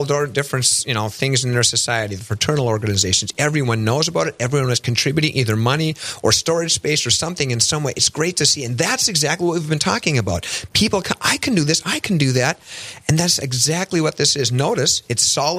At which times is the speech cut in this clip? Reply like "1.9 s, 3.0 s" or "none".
none